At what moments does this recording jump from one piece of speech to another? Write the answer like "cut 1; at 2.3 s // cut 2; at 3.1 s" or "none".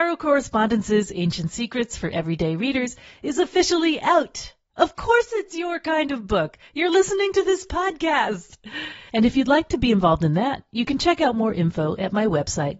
cut 1; at 4.7 s // cut 2; at 9.1 s